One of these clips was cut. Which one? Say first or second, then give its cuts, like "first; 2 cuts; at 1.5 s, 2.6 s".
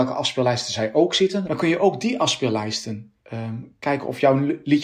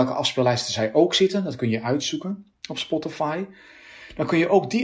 first; 2 cuts; at 1.4 s, 3.2 s